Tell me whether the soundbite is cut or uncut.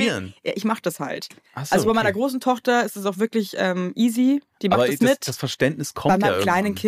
uncut